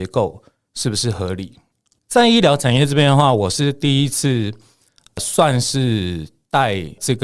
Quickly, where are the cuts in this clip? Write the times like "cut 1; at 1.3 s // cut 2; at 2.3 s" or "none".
cut 1; at 2.0 s